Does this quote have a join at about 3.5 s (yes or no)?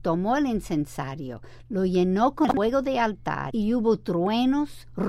yes